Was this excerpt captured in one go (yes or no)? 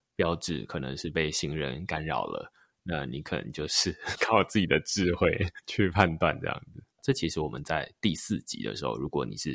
no